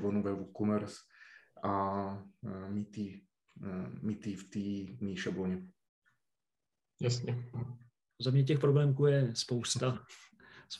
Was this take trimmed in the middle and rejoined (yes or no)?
yes